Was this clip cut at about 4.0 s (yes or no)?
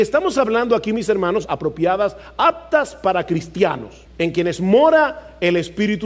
yes